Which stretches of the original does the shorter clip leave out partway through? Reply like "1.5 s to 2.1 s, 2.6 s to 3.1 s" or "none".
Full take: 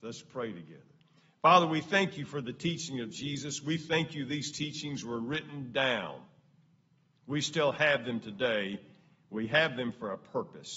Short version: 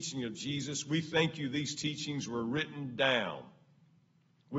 none